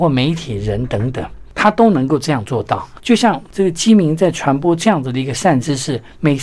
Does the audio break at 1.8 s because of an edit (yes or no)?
no